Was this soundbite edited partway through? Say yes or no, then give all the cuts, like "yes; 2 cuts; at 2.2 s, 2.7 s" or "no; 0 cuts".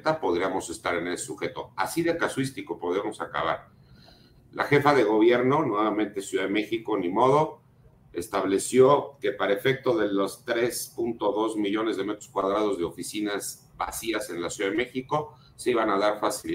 no; 0 cuts